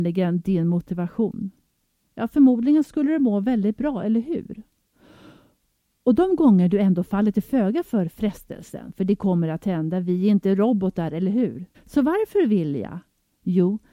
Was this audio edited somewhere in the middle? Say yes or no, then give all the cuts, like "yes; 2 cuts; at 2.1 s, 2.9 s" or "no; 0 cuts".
yes; 2 cuts; at 2.0 s, 11.7 s